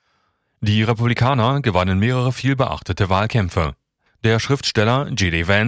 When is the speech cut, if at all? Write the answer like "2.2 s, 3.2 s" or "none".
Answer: 4.1 s